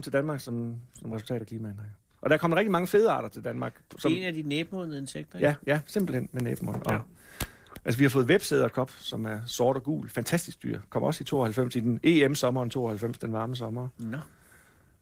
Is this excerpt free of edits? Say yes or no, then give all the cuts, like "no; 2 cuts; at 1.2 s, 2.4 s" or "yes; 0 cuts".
yes; 0 cuts